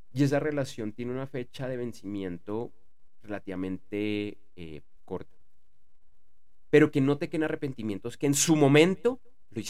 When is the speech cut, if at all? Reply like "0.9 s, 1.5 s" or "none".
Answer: 6.7 s